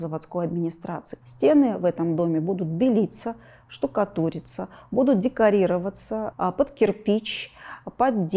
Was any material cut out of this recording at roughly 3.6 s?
no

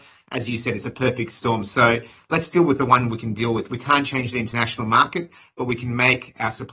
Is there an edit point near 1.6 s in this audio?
no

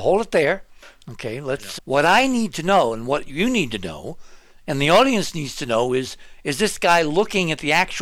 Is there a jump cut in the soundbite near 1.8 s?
yes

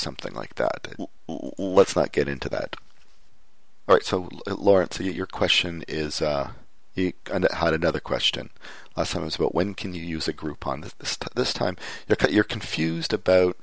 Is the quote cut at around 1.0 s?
yes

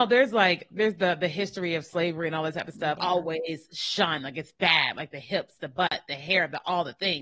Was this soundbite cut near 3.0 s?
yes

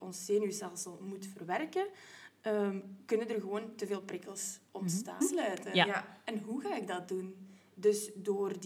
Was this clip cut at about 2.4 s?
no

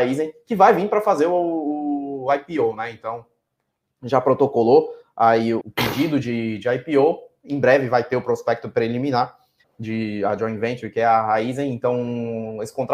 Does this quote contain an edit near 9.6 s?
yes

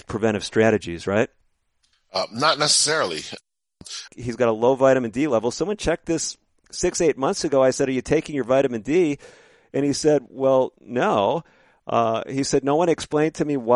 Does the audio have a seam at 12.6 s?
no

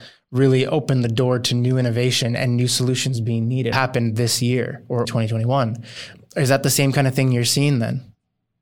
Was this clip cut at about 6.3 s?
no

